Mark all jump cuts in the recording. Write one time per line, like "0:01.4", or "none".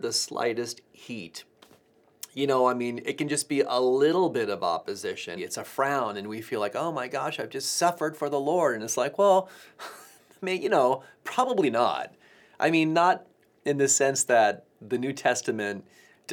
0:05.4